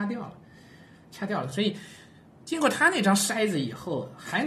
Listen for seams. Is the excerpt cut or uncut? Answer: uncut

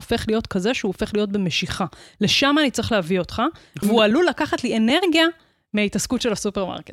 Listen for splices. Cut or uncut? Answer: cut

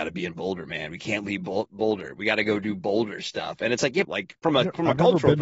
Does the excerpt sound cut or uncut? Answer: cut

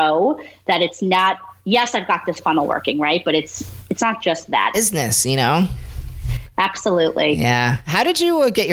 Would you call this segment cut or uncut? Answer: cut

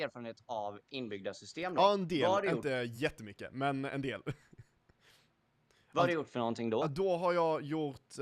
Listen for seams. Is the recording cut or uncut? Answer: uncut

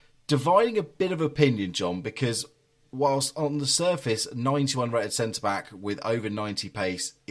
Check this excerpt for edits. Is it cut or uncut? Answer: uncut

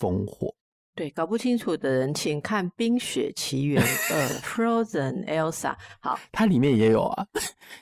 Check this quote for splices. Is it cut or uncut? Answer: uncut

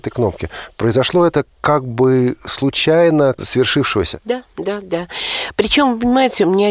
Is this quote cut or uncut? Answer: cut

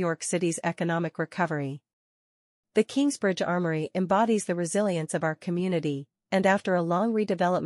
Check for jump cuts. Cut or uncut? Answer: uncut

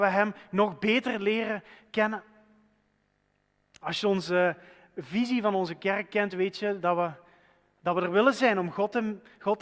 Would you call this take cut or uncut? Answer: uncut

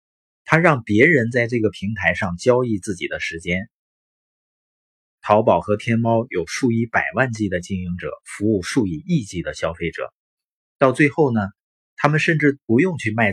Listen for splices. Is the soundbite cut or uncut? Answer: uncut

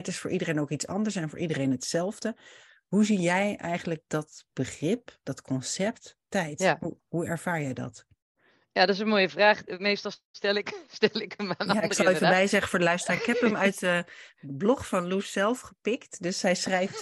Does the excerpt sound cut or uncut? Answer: uncut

